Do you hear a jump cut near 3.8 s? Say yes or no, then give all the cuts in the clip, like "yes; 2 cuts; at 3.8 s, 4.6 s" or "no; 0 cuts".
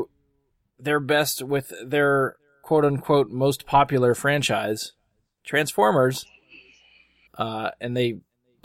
no; 1 cut; at 7.3 s